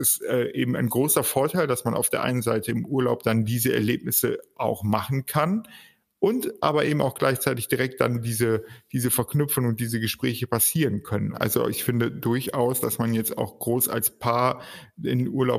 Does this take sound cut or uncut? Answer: cut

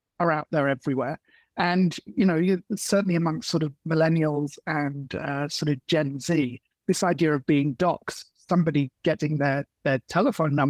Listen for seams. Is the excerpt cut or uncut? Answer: uncut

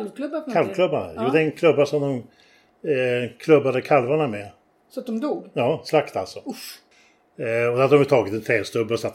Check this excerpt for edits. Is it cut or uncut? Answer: uncut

